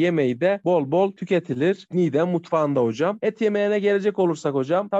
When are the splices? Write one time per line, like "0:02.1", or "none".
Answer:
0:03.2